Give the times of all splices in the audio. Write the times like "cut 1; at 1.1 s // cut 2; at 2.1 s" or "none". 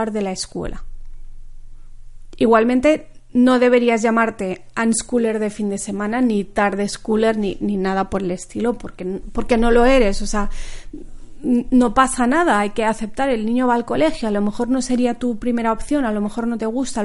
none